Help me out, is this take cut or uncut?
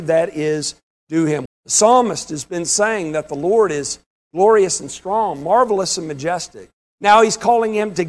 cut